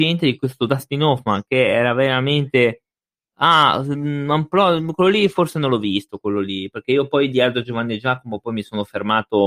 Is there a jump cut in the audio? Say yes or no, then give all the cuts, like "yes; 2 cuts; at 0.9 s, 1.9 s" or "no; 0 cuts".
no; 0 cuts